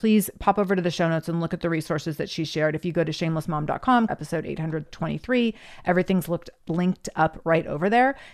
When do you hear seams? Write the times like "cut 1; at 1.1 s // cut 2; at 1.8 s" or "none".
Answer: cut 1; at 4.1 s